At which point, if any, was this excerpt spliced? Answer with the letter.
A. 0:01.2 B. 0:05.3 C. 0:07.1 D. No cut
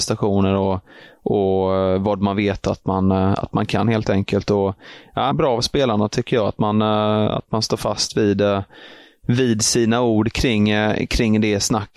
B